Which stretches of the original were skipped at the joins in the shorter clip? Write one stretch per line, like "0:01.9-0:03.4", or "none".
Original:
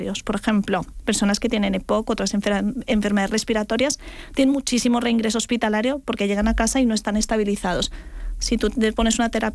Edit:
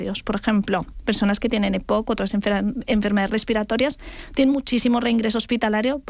none